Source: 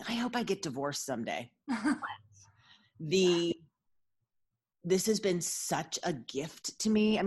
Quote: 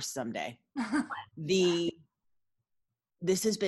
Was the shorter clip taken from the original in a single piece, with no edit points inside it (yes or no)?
no